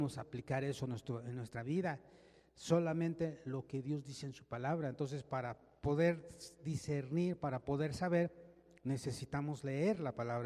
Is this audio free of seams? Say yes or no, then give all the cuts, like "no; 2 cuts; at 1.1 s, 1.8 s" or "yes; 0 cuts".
yes; 0 cuts